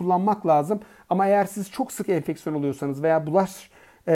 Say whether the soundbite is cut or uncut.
uncut